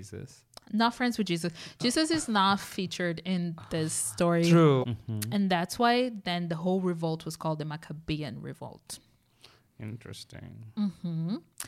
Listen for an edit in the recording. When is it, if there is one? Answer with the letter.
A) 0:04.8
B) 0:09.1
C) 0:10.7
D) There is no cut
A